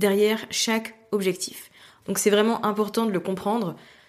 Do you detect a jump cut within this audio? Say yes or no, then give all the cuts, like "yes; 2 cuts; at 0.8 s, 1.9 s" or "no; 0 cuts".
yes; 1 cut; at 2.0 s